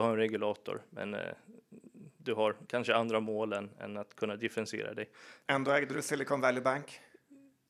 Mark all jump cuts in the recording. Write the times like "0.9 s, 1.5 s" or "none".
none